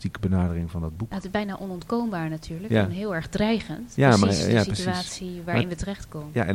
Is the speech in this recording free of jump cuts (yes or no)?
yes